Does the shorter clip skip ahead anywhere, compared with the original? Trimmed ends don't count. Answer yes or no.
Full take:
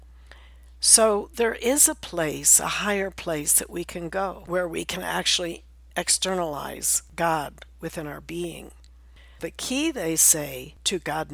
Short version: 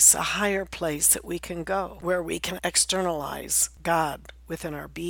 yes